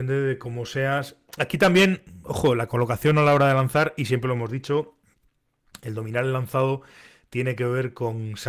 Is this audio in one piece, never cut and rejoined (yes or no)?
yes